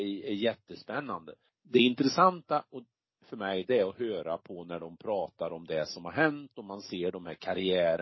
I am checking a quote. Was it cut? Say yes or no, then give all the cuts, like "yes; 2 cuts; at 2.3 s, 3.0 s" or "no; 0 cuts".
yes; 1 cut; at 1.5 s